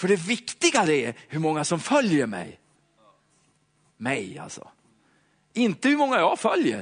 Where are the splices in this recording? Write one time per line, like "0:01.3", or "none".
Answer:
none